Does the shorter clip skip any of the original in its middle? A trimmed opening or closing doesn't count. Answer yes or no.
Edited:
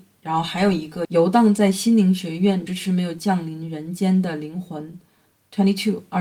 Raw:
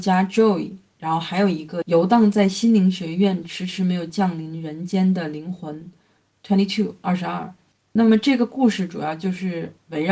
yes